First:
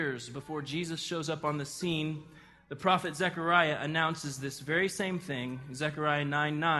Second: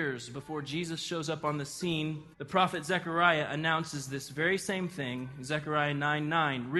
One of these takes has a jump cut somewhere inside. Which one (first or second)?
second